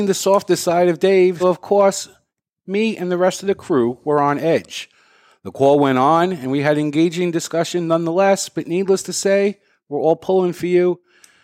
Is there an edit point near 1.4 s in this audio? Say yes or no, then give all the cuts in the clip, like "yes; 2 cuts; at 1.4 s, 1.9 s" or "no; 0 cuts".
yes; 1 cut; at 1.4 s